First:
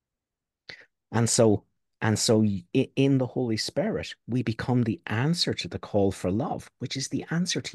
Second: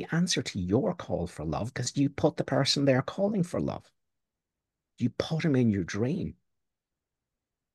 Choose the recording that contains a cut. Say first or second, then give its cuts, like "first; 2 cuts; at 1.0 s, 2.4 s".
second; 1 cut; at 4.9 s